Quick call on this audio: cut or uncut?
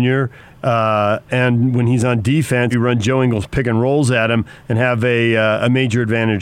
cut